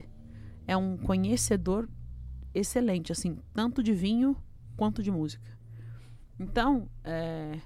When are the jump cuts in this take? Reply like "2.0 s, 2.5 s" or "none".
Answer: none